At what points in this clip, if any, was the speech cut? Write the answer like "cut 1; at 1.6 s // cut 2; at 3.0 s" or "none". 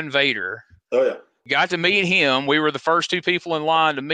none

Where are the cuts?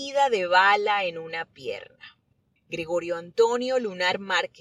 cut 1; at 2.6 s

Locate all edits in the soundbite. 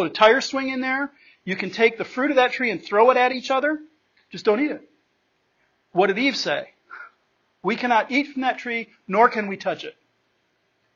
none

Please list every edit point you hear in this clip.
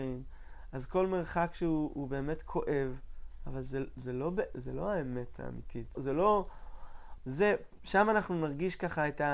cut 1; at 6.0 s // cut 2; at 7.2 s

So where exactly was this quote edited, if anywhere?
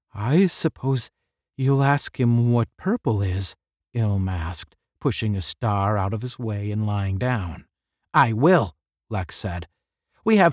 none

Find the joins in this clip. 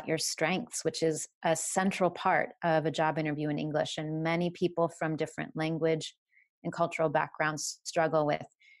none

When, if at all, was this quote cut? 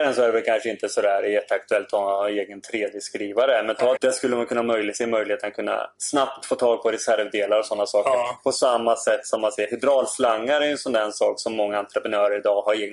cut 1; at 4.0 s

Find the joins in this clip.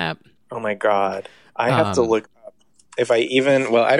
none

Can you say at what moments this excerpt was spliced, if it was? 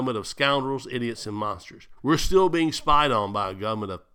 cut 1; at 2.0 s

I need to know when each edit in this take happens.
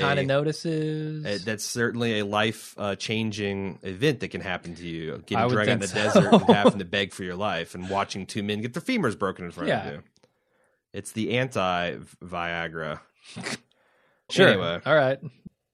cut 1; at 14.3 s

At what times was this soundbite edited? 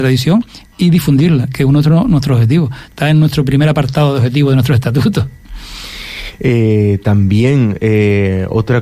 none

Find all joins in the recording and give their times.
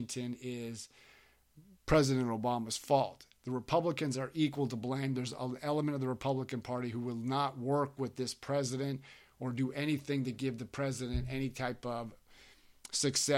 none

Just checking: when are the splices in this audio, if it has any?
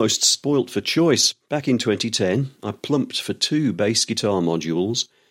none

